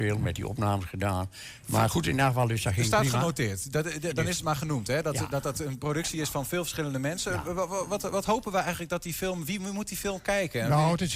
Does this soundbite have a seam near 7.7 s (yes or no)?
no